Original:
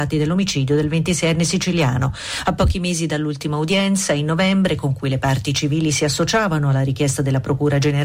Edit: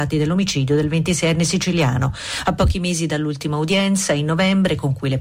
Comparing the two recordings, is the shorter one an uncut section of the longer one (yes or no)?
yes